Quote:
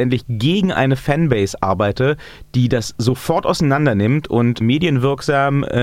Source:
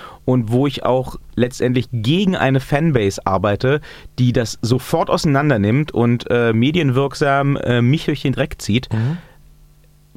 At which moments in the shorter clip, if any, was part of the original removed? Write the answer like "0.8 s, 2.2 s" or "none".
4.6 s